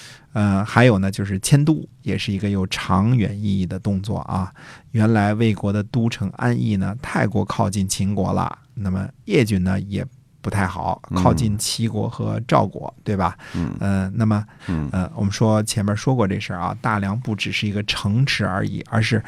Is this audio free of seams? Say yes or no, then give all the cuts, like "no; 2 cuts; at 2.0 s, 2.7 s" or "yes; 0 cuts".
no; 1 cut; at 14.6 s